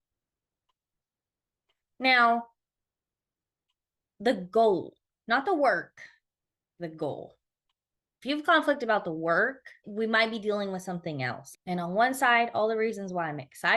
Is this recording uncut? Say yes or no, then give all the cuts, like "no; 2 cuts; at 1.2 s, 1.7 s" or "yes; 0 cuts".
no; 2 cuts; at 9.8 s, 11.5 s